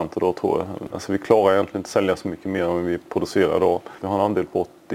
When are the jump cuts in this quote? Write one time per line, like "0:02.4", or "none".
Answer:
0:00.9
0:04.0